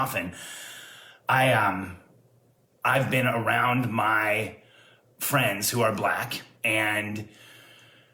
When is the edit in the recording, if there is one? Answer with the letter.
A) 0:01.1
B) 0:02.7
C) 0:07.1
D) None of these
B